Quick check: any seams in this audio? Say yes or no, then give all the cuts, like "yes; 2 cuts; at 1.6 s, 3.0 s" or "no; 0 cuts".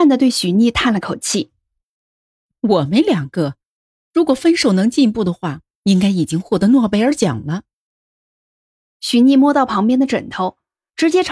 no; 0 cuts